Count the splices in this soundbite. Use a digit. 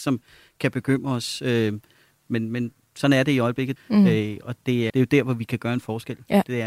2